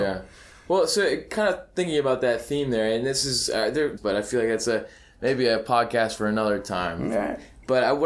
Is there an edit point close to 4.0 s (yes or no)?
yes